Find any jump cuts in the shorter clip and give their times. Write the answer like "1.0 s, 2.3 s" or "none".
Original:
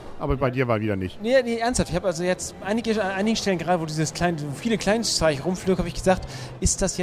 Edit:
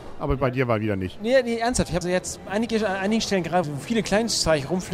2.0 s, 3.6 s